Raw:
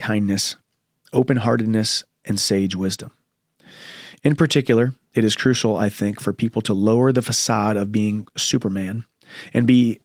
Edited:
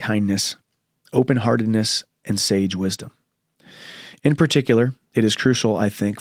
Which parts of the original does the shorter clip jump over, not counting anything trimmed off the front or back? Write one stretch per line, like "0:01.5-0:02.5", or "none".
none